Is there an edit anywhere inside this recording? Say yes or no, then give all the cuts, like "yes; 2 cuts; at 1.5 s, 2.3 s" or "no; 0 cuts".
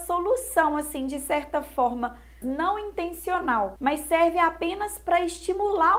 yes; 2 cuts; at 2.4 s, 3.8 s